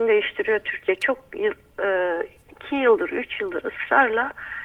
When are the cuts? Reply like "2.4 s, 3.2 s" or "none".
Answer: none